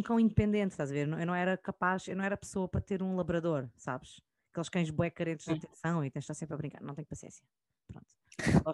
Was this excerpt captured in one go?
yes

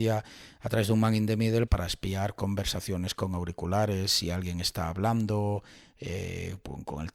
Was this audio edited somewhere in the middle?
yes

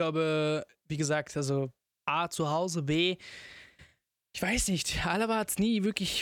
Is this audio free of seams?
yes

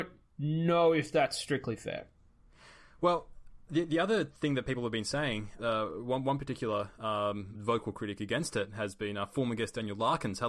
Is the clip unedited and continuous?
no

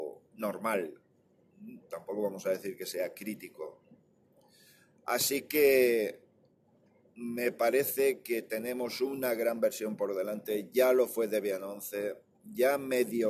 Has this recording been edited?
no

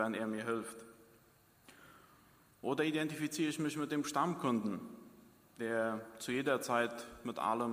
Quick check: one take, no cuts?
yes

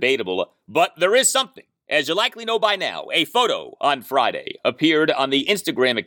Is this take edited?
no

